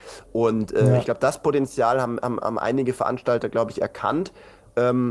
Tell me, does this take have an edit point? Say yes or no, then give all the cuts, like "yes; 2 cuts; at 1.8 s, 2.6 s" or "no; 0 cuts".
no; 0 cuts